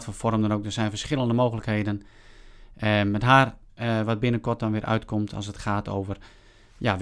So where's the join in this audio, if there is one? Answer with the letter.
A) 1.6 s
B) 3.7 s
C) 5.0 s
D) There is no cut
B